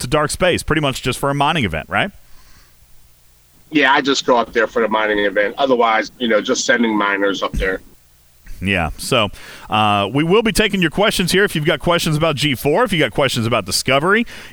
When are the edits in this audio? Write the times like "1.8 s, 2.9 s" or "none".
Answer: 6.1 s

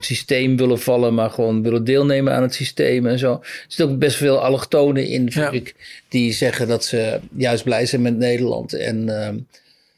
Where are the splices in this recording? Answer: none

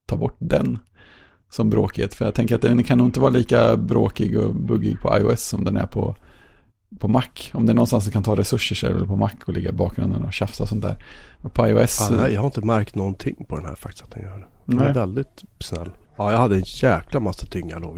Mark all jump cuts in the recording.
16.0 s

